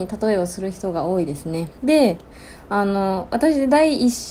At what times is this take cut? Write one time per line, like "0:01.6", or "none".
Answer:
0:01.8